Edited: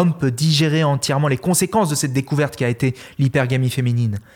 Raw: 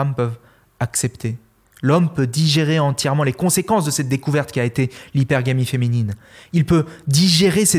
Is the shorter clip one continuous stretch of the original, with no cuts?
yes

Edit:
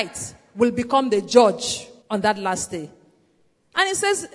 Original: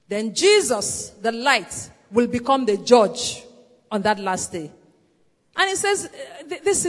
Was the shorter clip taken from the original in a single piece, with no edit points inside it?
no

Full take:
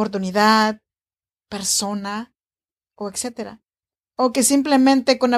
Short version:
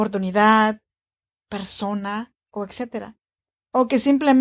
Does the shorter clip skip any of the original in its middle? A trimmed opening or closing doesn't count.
yes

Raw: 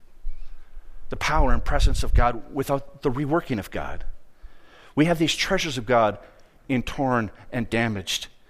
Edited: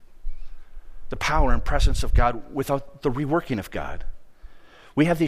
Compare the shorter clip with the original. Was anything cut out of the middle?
no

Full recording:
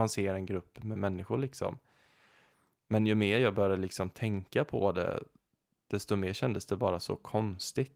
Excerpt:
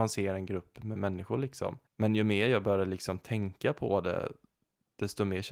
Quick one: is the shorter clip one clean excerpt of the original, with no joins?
no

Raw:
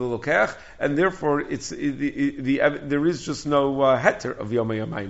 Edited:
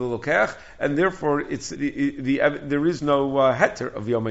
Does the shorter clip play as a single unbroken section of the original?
no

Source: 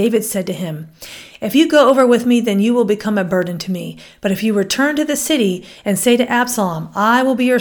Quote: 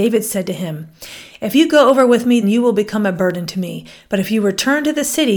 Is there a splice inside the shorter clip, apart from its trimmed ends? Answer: yes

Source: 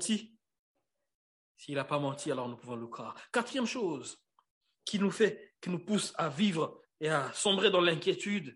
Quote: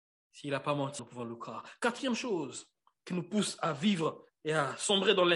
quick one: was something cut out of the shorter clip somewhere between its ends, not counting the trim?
yes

